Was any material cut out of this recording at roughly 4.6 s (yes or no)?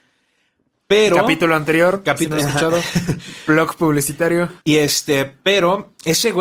yes